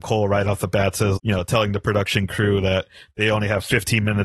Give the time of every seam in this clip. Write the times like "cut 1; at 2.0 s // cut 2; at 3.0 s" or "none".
cut 1; at 1.2 s